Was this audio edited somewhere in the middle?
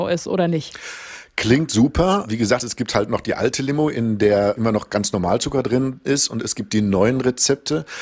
no; 0 cuts

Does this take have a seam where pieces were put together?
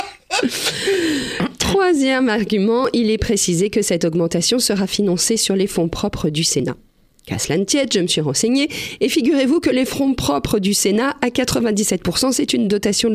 no; 0 cuts

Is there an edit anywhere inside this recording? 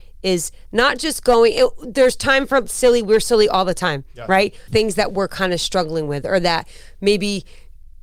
yes; 1 cut; at 4.7 s

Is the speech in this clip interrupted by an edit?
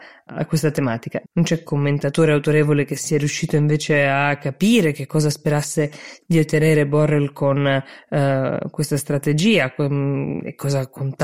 yes; 1 cut; at 1.2 s

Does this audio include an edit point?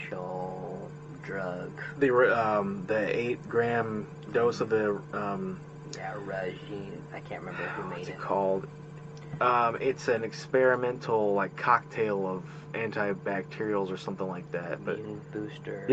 no; 0 cuts

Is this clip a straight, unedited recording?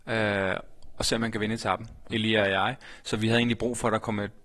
no; 1 cut; at 2.1 s

